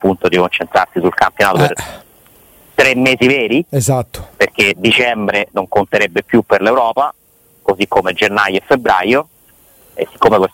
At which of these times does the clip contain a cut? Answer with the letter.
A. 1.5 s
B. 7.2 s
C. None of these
C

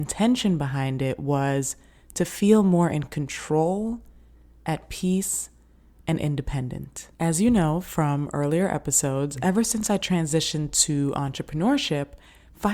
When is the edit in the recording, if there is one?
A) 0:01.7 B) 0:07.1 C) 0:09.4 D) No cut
B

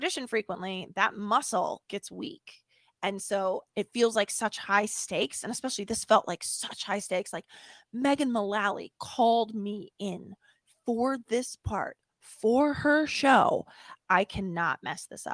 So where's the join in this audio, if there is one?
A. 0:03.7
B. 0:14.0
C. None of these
A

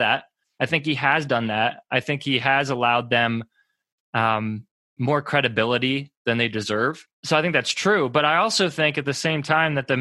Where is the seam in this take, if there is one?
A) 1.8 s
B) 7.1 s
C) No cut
B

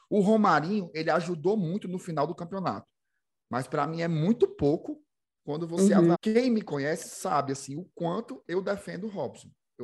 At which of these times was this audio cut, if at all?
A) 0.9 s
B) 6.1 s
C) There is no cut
B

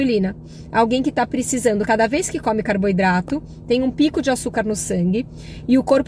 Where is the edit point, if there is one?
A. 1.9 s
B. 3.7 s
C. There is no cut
C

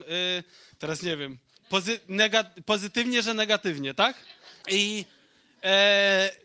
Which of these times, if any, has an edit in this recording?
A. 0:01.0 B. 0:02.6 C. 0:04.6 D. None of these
C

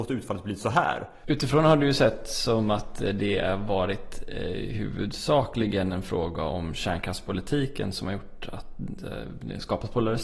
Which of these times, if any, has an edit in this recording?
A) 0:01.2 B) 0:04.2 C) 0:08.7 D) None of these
A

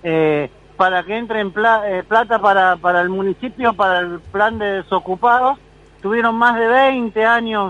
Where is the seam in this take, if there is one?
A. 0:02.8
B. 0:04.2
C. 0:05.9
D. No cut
D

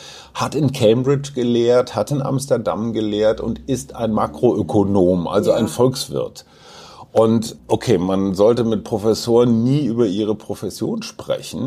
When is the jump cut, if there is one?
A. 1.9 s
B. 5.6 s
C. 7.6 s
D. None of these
C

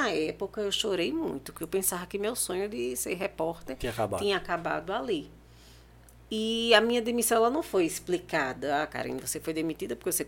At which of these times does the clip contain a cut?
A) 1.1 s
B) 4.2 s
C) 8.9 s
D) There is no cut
D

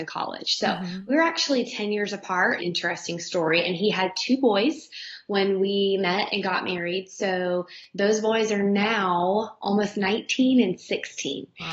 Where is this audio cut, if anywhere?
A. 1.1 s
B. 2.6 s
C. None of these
B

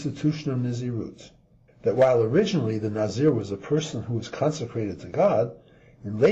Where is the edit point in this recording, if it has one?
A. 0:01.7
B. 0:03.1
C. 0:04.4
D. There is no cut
A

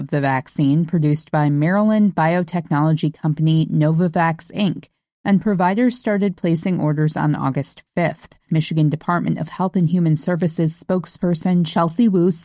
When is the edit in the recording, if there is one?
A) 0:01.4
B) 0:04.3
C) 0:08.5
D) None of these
C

